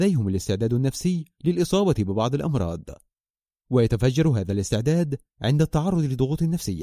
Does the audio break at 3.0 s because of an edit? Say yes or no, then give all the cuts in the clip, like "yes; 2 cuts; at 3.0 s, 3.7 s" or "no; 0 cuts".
no; 0 cuts